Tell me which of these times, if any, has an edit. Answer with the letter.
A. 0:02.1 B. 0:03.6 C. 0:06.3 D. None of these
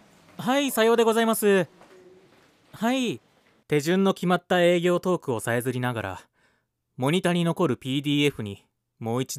B